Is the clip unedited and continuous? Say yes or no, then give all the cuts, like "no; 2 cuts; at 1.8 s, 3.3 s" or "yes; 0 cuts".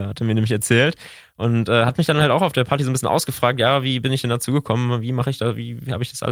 yes; 0 cuts